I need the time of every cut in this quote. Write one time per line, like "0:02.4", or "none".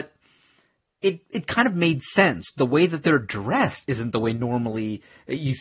none

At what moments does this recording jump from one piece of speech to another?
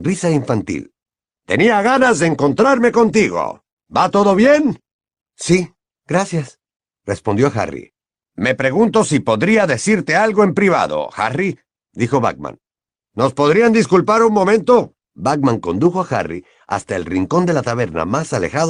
0:15.0

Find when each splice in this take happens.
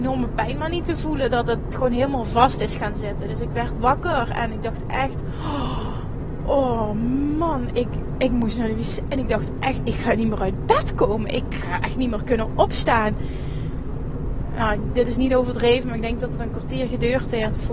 none

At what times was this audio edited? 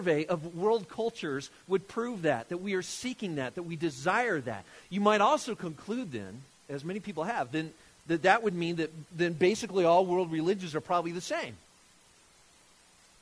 0:04.8

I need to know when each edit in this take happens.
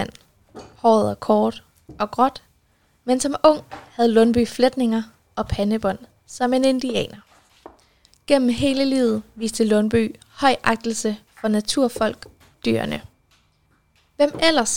0:12.5

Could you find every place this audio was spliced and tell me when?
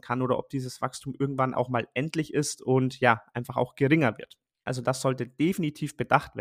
0:04.7

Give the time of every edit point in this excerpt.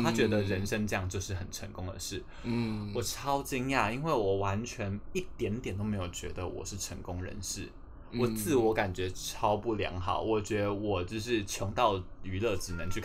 none

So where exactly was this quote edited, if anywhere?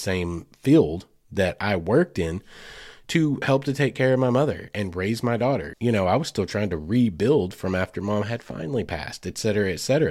0:05.7

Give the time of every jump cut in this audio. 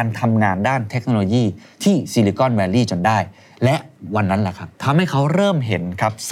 0:04.7

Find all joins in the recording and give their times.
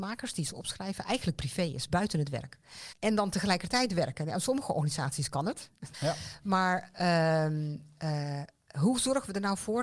0:02.9
0:05.9

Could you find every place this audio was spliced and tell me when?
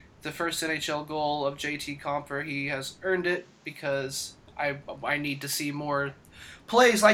none

